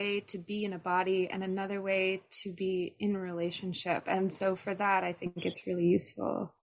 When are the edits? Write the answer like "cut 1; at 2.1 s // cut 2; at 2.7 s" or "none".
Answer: none